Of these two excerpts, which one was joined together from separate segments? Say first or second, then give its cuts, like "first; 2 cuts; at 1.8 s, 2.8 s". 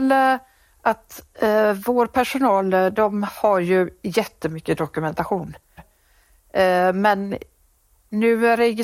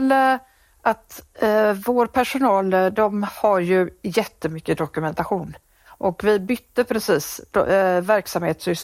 first; 1 cut; at 5.8 s